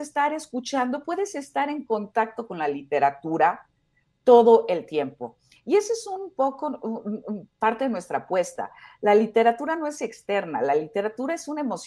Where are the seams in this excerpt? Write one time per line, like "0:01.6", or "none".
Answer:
none